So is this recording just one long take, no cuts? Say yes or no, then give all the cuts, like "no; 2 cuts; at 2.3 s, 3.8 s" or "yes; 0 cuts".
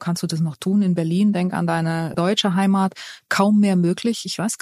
no; 1 cut; at 2.1 s